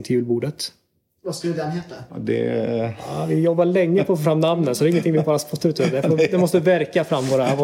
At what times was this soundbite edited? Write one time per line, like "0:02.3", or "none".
0:02.1